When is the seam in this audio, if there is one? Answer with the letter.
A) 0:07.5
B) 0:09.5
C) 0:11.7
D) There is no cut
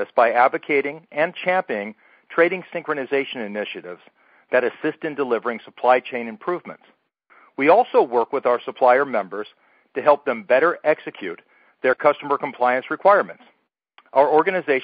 D